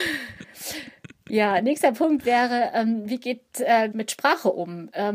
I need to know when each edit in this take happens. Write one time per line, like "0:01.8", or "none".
0:03.9

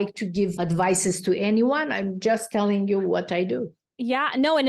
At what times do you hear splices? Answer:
none

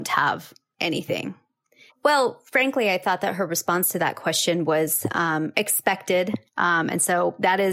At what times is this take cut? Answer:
0:01.9
0:06.4

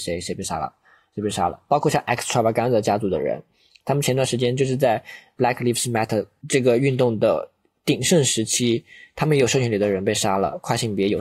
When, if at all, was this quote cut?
none

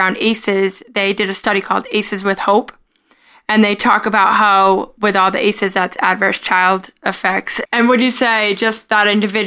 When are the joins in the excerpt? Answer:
0:07.7

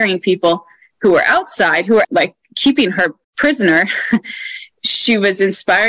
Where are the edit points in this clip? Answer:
0:02.0
0:03.2

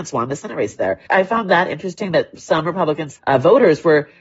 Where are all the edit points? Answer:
0:01.1
0:03.2

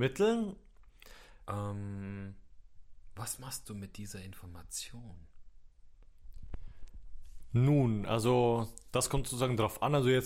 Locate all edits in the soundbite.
0:01.4

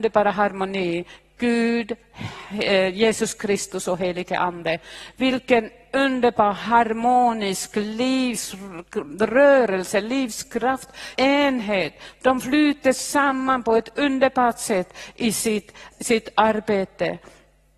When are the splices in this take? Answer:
0:11.2
0:15.9

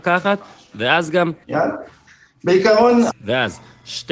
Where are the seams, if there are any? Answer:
0:01.4
0:03.1

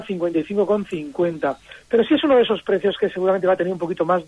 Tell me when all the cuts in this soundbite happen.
none

